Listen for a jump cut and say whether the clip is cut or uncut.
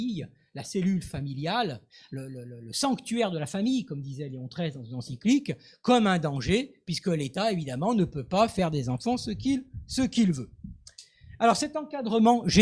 uncut